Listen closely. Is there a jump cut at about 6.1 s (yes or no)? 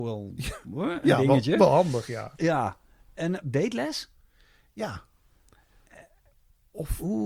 no